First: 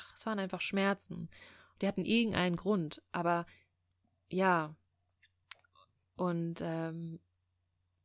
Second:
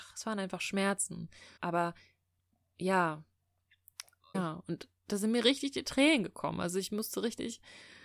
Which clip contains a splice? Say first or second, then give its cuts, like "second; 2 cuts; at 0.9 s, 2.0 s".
second; 2 cuts; at 1.6 s, 4.3 s